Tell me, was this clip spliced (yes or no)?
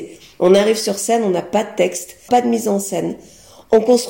yes